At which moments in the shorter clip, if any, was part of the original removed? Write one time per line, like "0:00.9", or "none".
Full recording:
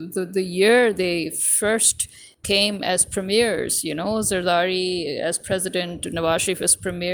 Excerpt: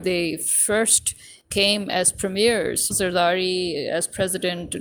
0:02.9